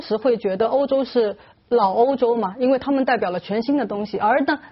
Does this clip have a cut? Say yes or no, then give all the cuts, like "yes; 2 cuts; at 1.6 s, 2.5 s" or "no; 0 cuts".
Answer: no; 0 cuts